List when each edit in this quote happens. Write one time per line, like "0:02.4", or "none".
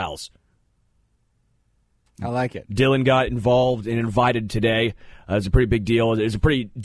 none